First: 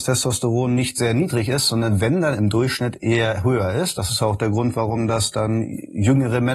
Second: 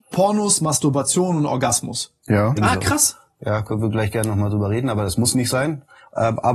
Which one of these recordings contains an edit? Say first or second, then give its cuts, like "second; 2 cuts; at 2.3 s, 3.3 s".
second; 1 cut; at 2.6 s